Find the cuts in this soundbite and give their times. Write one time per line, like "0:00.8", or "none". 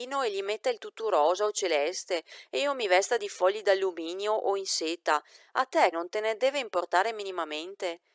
0:05.9